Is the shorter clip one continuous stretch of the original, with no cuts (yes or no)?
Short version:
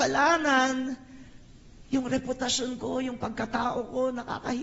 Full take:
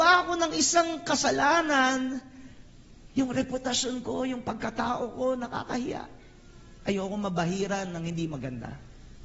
yes